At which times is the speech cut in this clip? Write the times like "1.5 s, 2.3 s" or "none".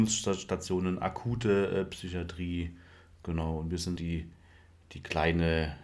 4.0 s